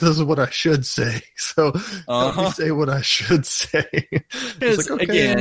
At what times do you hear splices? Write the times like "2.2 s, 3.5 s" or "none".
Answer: none

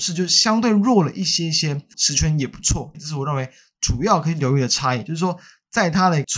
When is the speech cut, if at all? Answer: 1.9 s, 2.9 s

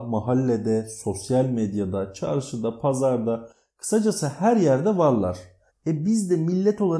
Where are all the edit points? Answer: 5.7 s

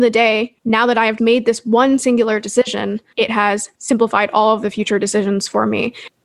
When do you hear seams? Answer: 1.2 s

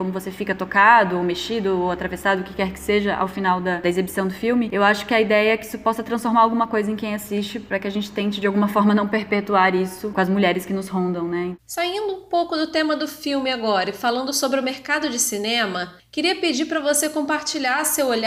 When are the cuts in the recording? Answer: none

